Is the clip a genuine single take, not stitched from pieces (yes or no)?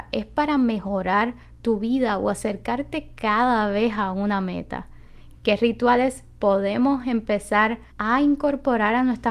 no